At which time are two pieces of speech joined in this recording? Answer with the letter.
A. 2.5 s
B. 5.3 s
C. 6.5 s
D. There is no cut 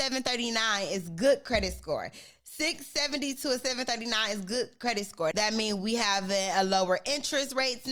B